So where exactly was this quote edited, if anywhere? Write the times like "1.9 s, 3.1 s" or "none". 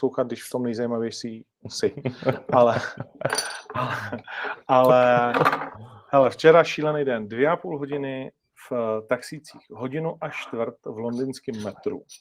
none